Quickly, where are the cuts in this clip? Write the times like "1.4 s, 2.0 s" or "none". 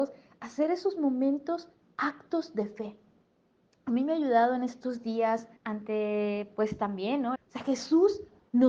5.6 s, 7.4 s